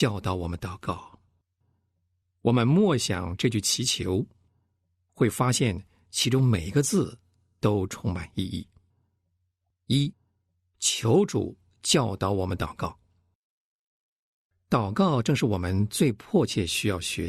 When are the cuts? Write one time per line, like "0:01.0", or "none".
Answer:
none